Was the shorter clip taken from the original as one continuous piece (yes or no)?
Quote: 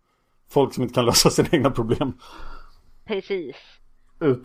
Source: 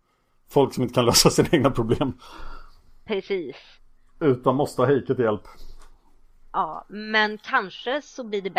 yes